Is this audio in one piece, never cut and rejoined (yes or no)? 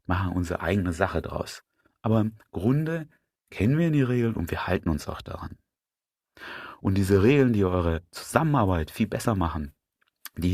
yes